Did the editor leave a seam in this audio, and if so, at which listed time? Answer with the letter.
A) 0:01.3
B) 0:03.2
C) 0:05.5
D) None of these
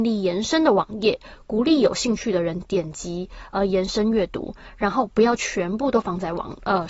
D